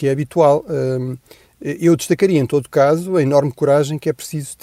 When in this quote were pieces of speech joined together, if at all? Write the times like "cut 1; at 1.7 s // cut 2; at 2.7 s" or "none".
none